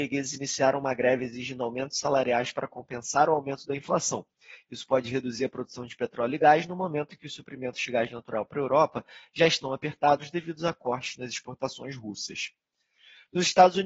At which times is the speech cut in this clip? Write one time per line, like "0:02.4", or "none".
none